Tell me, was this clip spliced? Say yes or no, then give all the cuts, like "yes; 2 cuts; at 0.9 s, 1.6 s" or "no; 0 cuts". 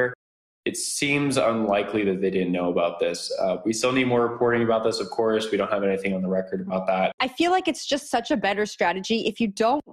yes; 1 cut; at 7.2 s